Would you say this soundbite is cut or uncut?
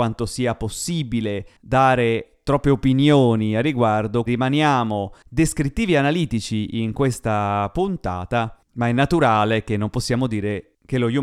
cut